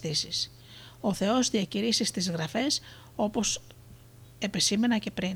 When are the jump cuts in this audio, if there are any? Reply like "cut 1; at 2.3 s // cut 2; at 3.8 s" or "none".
none